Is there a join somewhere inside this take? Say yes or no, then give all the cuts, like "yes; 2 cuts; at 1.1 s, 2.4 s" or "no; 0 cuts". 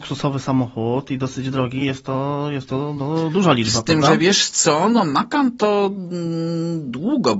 no; 0 cuts